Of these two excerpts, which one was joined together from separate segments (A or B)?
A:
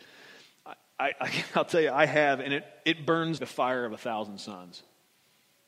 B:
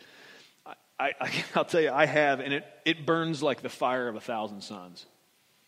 A